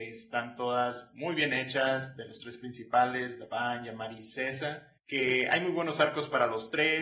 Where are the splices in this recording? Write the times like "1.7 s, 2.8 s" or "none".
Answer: 5.0 s